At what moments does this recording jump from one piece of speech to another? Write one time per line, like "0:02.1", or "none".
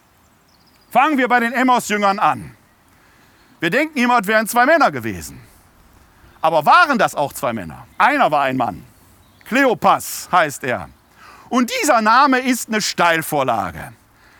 0:07.9